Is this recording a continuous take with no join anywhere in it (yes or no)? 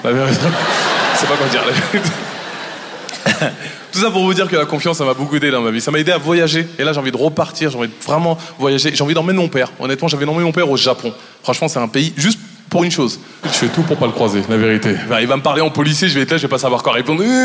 no